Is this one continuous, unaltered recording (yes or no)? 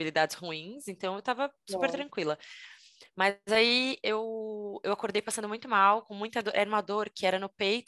yes